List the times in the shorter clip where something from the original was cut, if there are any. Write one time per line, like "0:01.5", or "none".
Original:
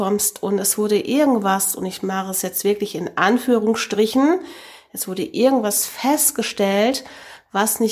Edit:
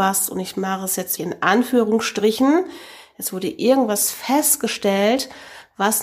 0:01.2